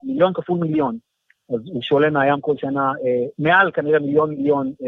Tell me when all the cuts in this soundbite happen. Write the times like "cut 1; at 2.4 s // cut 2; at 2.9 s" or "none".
none